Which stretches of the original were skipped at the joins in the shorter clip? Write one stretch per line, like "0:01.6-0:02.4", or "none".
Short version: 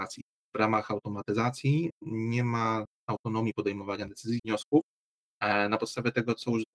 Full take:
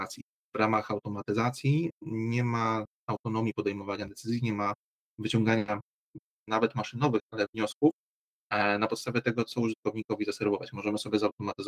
0:04.4-0:07.5